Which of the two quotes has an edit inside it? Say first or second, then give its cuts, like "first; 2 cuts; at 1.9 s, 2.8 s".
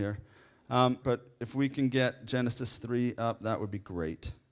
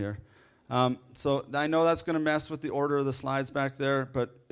first; 1 cut; at 1.0 s